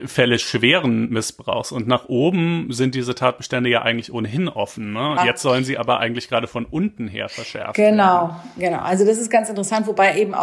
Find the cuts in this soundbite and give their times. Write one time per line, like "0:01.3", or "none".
0:05.2

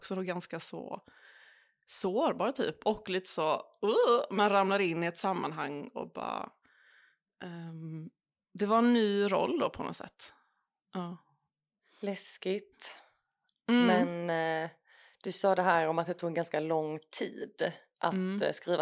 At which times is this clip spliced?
none

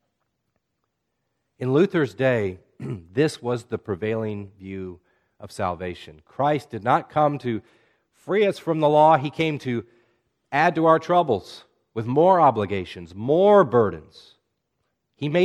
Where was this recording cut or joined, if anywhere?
none

